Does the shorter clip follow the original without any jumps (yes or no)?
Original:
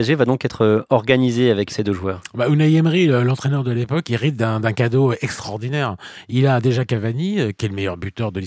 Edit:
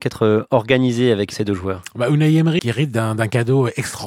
no